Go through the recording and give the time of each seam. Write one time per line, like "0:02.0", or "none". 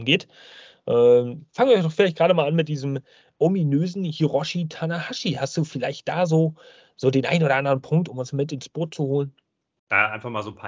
none